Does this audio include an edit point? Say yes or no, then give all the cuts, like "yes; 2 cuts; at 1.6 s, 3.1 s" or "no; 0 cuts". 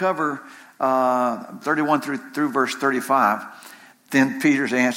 yes; 2 cuts; at 1.6 s, 3.9 s